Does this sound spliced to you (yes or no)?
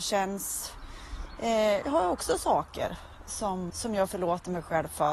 yes